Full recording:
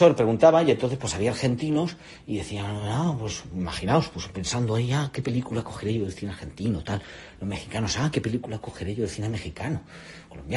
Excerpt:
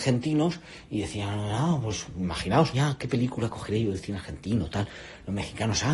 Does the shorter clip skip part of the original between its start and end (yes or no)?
yes